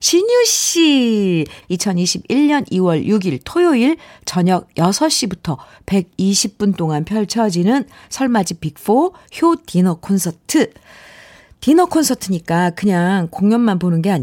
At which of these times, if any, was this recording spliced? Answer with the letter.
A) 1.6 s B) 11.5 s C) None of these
A